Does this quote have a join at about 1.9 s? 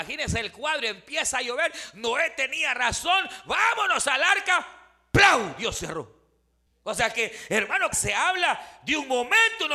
no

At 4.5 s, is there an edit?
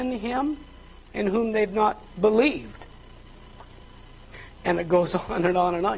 yes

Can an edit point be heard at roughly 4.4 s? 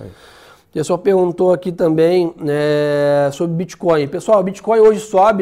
no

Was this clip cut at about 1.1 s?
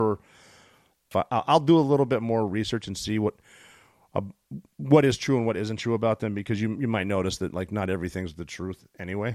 yes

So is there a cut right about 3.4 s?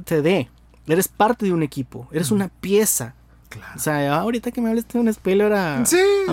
yes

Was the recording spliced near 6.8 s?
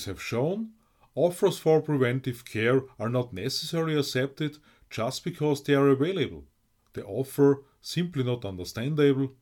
yes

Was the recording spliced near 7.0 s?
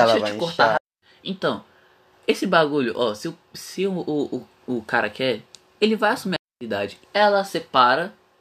yes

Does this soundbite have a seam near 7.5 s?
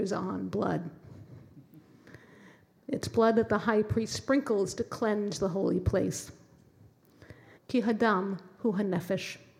yes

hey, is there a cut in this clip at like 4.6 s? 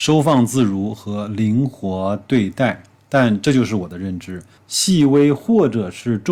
yes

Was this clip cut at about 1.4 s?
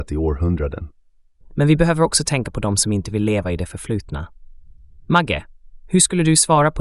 yes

